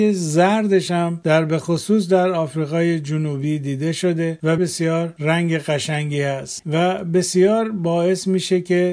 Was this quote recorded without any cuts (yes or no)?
no